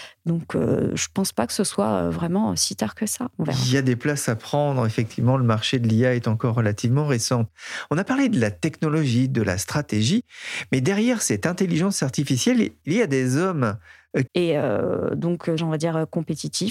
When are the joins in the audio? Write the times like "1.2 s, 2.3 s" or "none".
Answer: 14.3 s, 15.6 s